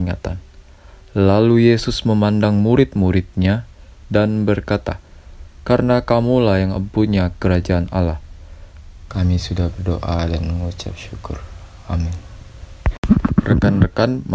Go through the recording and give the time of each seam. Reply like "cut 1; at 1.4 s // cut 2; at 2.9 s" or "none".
cut 1; at 5.6 s // cut 2; at 9.1 s